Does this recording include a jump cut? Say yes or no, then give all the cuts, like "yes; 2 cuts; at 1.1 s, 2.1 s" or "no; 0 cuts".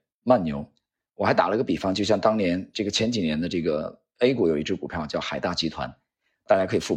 yes; 1 cut; at 2.9 s